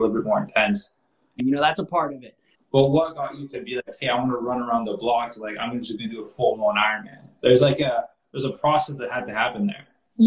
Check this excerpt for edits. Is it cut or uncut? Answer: cut